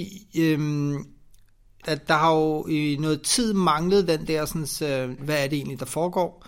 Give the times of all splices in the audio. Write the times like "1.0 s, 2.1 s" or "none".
1.8 s, 5.2 s